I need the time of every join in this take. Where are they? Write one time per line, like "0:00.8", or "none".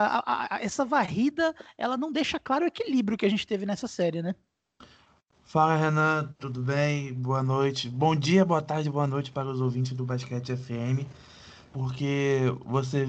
0:11.7